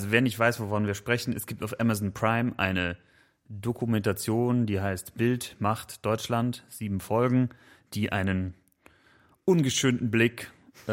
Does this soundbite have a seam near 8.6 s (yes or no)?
no